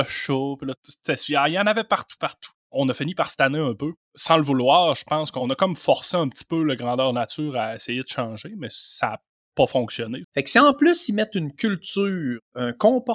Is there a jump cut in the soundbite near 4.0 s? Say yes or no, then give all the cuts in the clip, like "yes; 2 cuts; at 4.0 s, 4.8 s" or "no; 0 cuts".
no; 2 cuts; at 2.2 s, 10.2 s